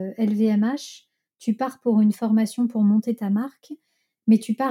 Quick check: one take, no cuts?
yes; 0 cuts

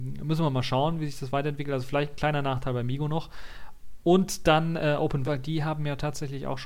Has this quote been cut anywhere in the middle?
yes; 1 cut; at 5.2 s

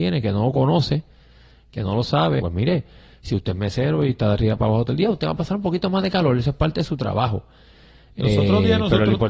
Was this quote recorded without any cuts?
no; 1 cut; at 2.4 s

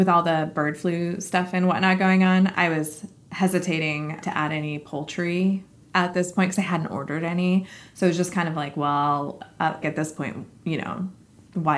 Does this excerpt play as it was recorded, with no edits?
no; 1 cut; at 9.8 s

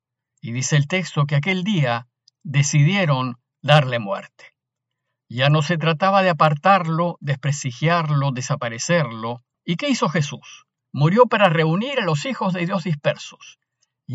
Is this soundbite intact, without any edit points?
no; 2 cuts; at 9.5 s, 10.8 s

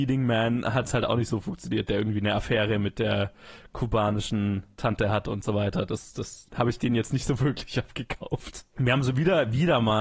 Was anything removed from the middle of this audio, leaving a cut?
yes; 2 cuts; at 6.5 s, 8.7 s

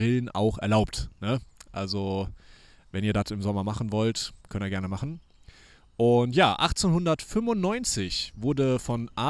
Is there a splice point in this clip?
no; 0 cuts

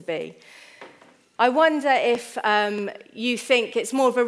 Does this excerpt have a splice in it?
yes; 1 cut; at 1.4 s

